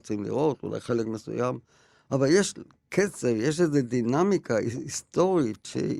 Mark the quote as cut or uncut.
uncut